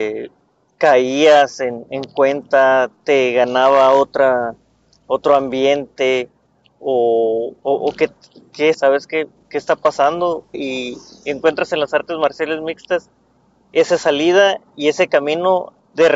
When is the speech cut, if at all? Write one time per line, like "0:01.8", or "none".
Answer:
0:07.6
0:08.7
0:10.5